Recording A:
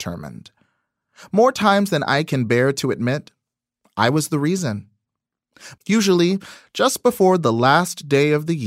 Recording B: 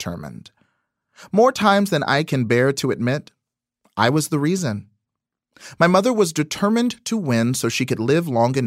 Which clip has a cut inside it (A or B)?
A